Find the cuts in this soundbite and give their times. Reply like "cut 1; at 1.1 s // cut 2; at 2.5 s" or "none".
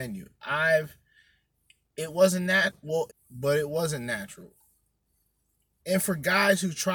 cut 1; at 3.1 s // cut 2; at 5.8 s

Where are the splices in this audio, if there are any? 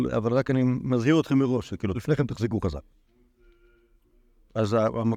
cut 1; at 1.9 s

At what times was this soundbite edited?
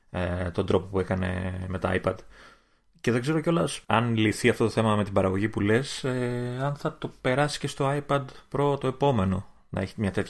cut 1; at 3.8 s

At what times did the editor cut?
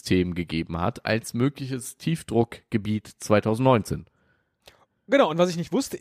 none

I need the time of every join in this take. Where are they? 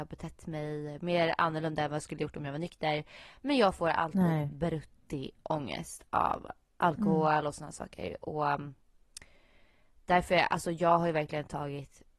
none

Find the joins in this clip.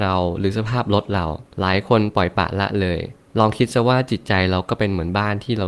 cut 1; at 1.5 s

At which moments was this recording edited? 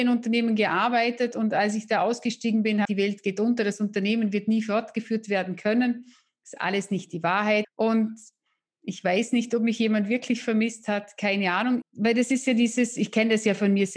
cut 1; at 2.8 s // cut 2; at 7.6 s // cut 3; at 11.8 s

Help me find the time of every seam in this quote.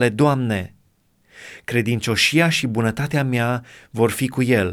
cut 1; at 1.6 s

